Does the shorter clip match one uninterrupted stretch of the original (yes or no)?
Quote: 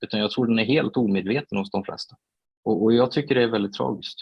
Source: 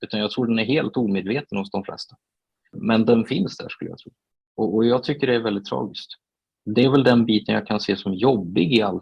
no